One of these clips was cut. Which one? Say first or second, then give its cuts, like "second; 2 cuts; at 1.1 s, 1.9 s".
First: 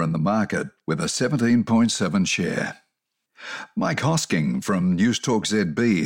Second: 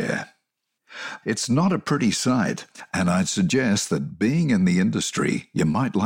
second; 1 cut; at 1.2 s